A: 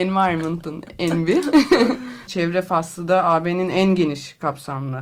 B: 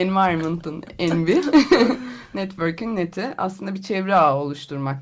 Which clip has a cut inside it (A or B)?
A